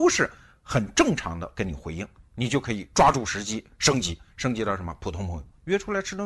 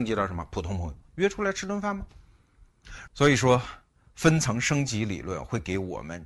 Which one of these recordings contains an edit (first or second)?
second